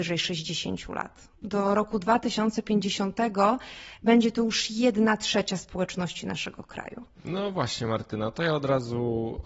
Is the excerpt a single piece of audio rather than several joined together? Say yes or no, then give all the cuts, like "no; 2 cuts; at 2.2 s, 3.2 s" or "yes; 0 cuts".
yes; 0 cuts